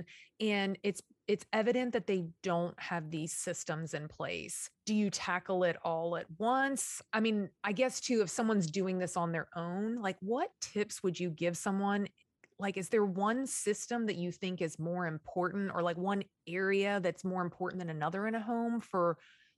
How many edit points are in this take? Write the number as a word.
zero